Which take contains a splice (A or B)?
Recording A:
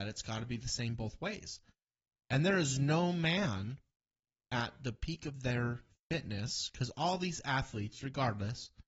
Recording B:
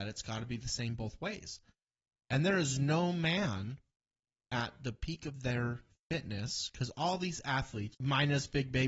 B